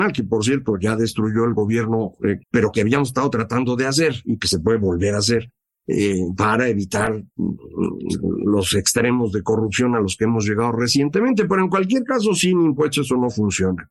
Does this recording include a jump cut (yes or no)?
yes